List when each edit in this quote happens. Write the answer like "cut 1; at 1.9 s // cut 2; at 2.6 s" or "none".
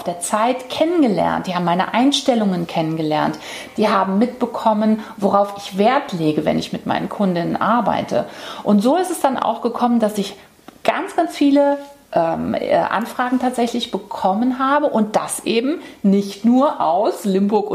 none